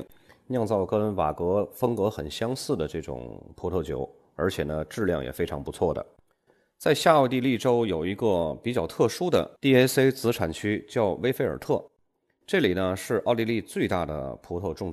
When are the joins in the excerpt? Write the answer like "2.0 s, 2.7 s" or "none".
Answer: none